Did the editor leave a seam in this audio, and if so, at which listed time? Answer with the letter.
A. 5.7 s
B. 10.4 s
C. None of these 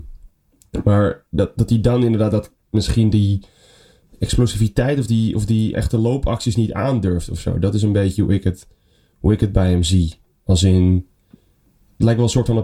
A